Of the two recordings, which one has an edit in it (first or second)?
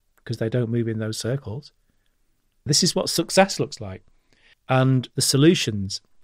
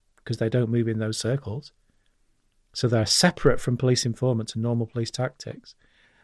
first